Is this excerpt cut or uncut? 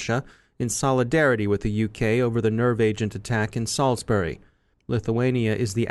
cut